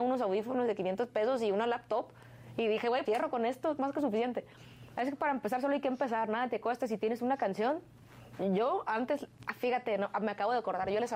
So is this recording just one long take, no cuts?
no; 2 cuts; at 3.1 s, 5.0 s

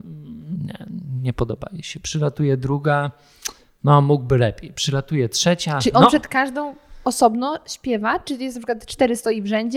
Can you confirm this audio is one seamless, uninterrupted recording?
yes; 0 cuts

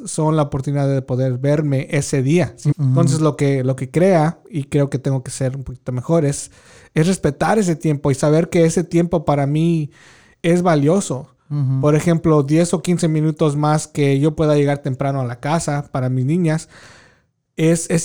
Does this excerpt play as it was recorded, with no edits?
no; 1 cut; at 2.7 s

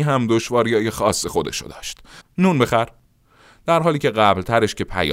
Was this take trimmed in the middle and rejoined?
yes; 1 cut; at 2.2 s

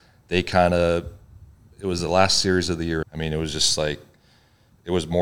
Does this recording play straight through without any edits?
no; 1 cut; at 3.0 s

